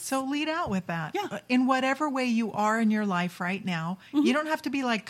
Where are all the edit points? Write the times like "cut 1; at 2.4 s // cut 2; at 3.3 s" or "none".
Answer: none